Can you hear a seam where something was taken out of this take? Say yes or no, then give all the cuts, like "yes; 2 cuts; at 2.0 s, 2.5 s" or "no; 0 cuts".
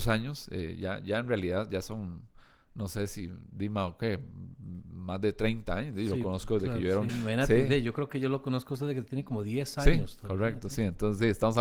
yes; 1 cut; at 7.1 s